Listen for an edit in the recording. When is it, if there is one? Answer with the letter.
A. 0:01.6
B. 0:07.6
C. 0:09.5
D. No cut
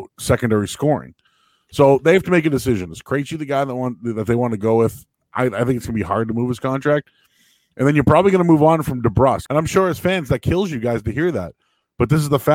C